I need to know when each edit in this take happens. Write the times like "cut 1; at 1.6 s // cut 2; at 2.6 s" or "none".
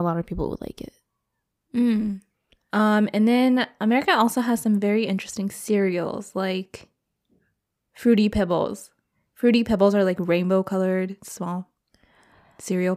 none